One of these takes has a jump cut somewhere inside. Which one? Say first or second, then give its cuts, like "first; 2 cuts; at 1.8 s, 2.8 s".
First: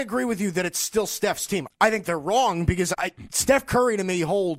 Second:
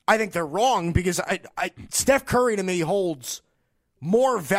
first; 2 cuts; at 1.7 s, 2.9 s